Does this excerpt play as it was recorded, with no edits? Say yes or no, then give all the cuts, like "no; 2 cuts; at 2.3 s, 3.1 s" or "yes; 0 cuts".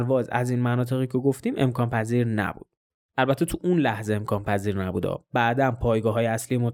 yes; 0 cuts